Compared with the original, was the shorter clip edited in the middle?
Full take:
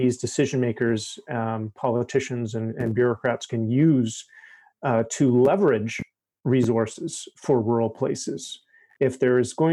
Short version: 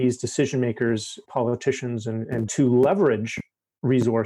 yes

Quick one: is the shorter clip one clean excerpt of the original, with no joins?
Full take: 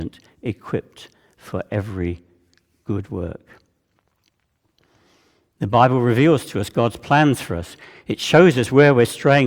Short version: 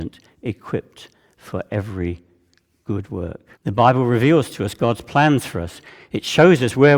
no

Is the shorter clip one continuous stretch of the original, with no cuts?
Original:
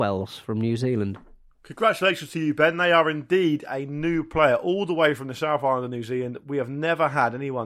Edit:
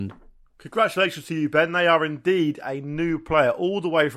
yes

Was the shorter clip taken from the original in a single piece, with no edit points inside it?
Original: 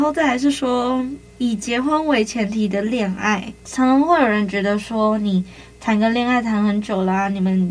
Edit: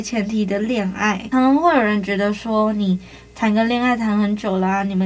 no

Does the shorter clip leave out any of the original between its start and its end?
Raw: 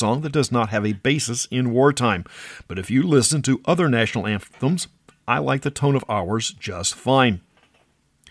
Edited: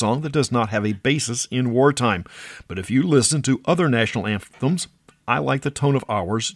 no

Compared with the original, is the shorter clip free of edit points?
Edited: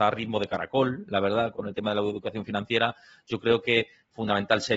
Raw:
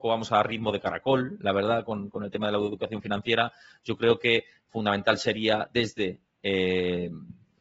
no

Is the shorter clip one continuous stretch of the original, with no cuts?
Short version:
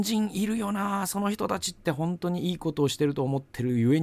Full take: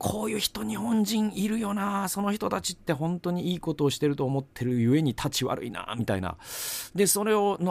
yes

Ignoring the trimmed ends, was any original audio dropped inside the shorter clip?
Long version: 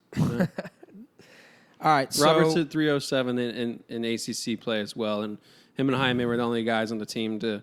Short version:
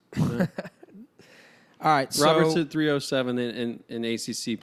no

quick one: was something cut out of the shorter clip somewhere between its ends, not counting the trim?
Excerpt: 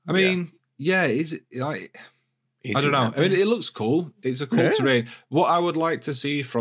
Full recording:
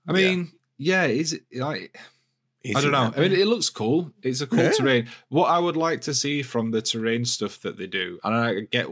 no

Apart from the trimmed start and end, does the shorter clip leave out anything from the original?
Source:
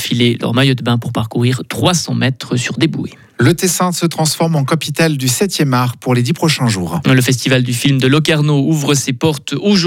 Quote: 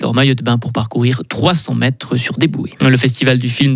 yes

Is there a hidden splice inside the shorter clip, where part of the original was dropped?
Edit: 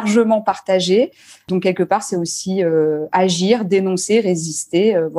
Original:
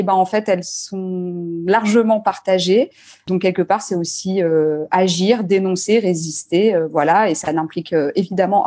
no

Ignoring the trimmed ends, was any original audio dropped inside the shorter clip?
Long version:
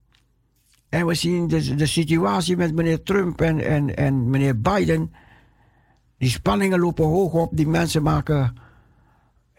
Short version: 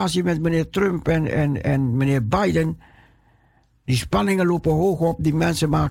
no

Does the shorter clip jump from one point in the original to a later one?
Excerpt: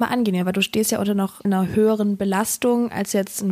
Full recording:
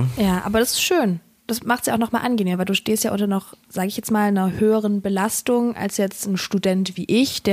yes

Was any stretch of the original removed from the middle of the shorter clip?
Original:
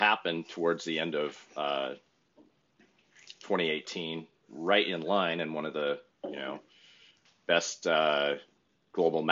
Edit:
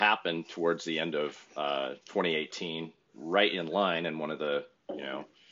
yes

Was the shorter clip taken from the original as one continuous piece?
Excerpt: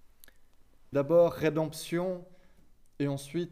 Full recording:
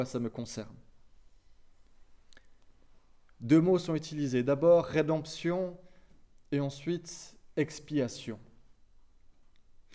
no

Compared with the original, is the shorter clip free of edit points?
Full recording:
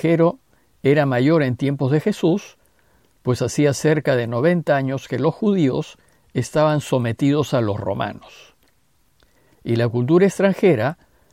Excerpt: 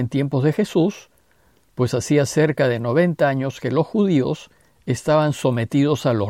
yes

